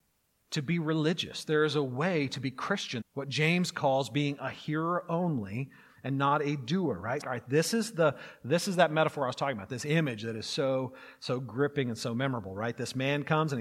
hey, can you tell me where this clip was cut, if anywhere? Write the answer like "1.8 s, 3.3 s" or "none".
3.0 s, 7.2 s